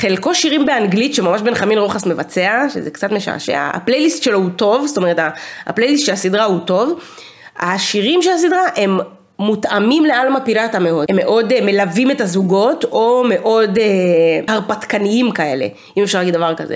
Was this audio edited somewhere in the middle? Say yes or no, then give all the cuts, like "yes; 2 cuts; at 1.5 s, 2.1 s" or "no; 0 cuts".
no; 0 cuts